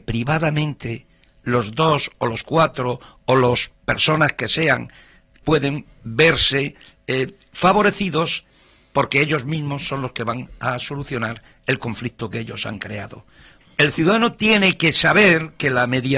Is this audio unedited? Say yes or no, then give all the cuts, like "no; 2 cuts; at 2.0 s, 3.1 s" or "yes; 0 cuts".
no; 2 cuts; at 5.4 s, 13.6 s